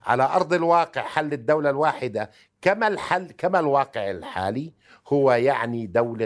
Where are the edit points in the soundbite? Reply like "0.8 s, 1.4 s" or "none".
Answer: none